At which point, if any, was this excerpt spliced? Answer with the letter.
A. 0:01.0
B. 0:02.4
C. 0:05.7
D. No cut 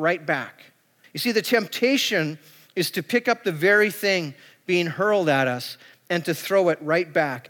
A